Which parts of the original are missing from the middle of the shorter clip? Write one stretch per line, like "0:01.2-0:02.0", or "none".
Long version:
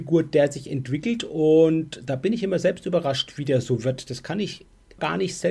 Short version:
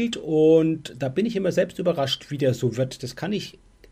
none